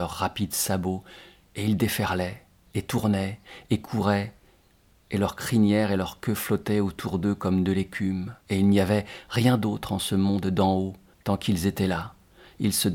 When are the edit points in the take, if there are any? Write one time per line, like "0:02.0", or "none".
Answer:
0:08.4
0:11.1

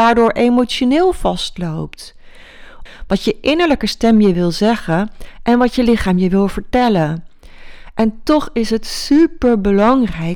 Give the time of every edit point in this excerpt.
0:02.9

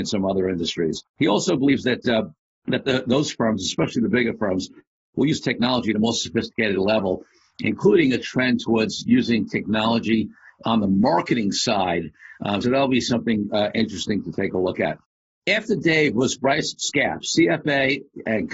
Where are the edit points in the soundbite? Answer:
0:01.1
0:12.6

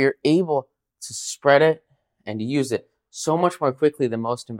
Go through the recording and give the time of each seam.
none

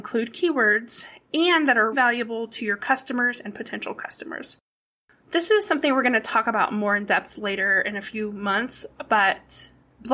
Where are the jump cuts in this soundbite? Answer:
0:01.9

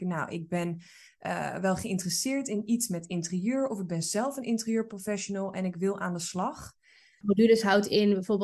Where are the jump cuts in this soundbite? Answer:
0:07.2

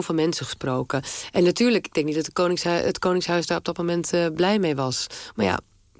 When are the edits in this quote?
none

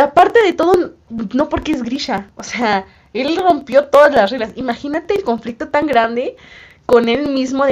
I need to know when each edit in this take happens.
none

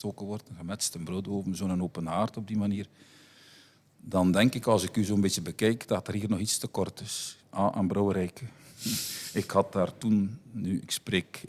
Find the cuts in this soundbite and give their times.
0:07.4

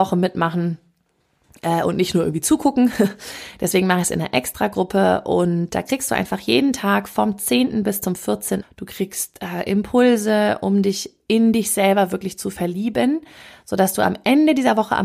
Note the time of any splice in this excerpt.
0:08.6

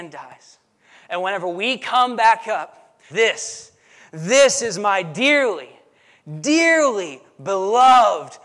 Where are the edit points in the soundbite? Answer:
0:03.1

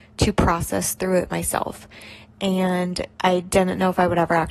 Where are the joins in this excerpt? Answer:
0:03.1

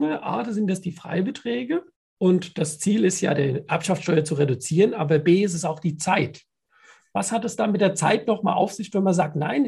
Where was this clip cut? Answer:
none

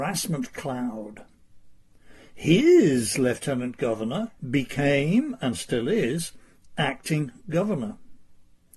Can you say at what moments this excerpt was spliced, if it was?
0:04.4

